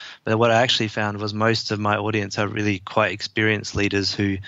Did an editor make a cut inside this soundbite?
no; 0 cuts

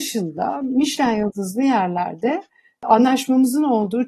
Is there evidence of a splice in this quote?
no; 0 cuts

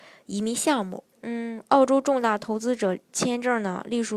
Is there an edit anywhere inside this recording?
yes; 1 cut; at 1.1 s

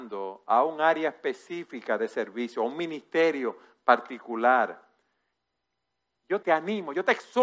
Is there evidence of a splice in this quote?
yes; 1 cut; at 6.4 s

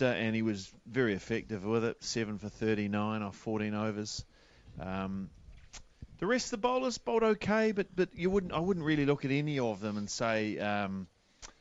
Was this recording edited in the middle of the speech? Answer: no; 0 cuts

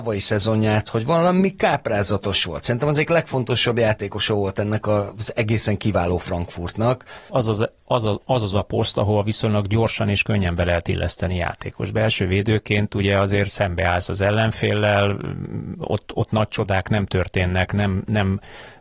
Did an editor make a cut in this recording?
yes; 1 cut; at 7.3 s

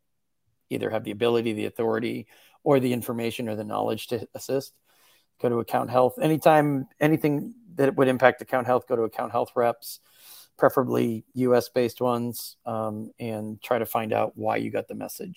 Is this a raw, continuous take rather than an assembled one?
yes; 0 cuts

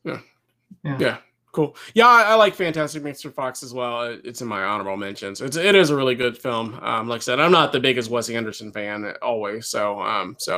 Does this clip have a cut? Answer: no; 0 cuts

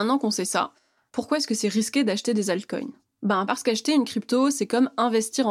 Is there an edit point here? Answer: no; 0 cuts

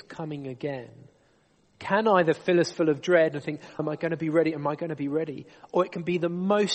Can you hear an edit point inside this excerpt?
yes; 1 cut; at 3.8 s

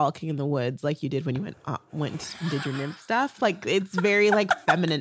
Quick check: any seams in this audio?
no; 0 cuts

